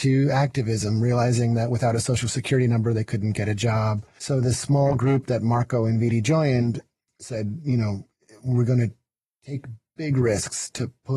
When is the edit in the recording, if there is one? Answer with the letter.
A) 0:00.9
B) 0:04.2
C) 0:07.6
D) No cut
B